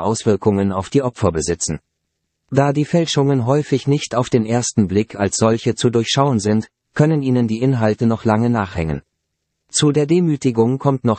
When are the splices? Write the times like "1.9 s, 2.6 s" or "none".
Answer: none